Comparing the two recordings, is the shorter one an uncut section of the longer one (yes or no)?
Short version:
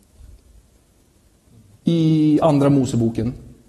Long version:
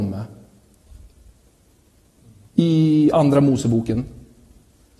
yes